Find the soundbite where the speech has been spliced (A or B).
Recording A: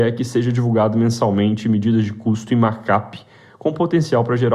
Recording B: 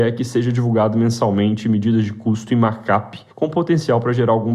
B